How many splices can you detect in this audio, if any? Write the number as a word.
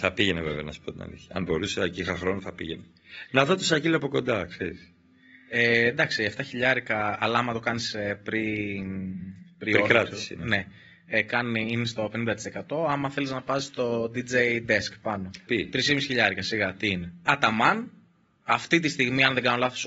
two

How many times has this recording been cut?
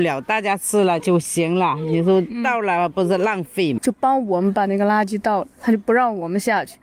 two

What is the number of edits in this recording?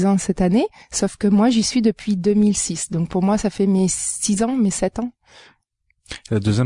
zero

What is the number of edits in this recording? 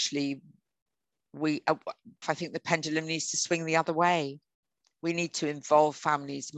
one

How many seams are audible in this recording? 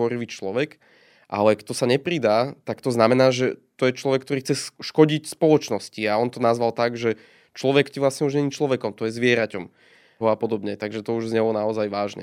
two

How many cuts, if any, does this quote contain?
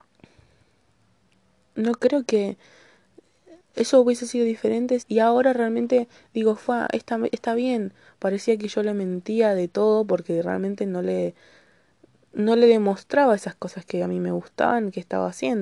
one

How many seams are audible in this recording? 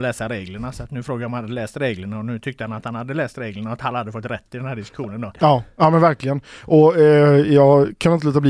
one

